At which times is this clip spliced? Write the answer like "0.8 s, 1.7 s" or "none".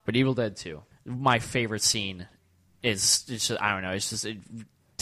0.9 s